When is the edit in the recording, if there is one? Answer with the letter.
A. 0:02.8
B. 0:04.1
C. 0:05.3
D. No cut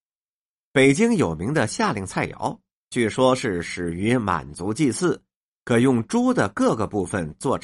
D